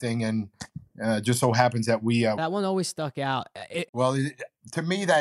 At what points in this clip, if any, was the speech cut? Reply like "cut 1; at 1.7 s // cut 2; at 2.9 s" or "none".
cut 1; at 2.4 s // cut 2; at 3.9 s